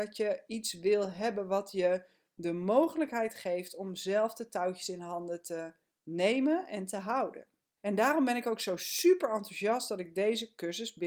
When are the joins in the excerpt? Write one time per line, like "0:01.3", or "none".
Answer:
0:07.8